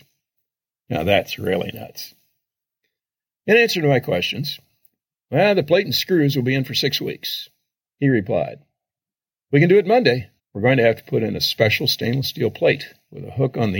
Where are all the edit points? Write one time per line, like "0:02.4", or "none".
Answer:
0:07.8
0:10.4